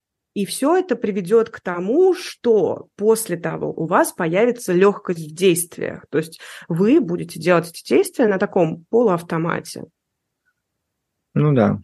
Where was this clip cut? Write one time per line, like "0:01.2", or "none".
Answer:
0:03.7